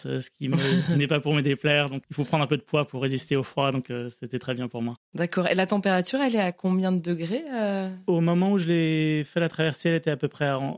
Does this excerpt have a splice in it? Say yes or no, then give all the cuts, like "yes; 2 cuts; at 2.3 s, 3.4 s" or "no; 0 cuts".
yes; 1 cut; at 2.0 s